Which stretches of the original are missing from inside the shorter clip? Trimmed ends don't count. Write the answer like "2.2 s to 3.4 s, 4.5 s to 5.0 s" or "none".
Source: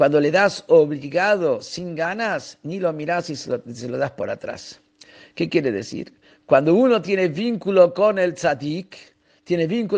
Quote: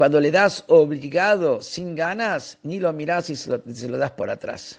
none